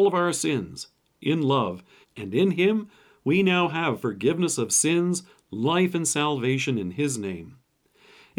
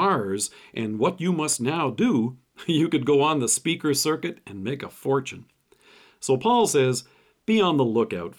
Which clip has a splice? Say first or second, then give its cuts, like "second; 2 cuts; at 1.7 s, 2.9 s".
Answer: first; 1 cut; at 2.0 s